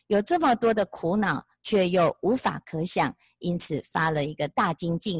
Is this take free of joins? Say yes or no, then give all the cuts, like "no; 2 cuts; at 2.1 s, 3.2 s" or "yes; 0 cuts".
yes; 0 cuts